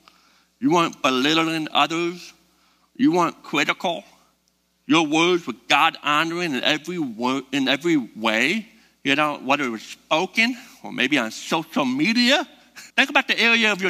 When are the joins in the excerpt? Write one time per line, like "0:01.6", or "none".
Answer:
0:12.9